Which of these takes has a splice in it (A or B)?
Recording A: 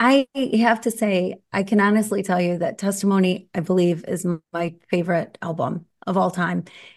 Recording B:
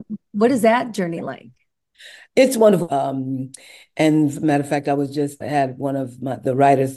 B